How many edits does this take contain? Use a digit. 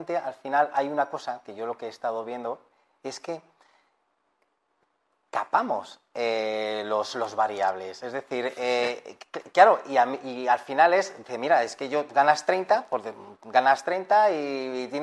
0